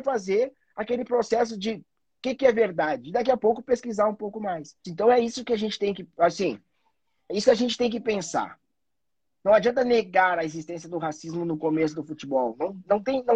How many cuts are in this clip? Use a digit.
1